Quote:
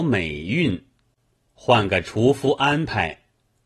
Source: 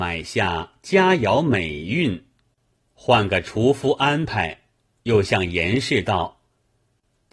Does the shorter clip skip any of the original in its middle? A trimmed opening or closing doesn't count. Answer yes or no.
no